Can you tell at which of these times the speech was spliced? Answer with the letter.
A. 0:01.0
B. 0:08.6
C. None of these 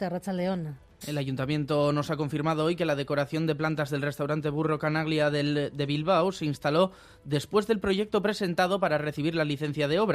A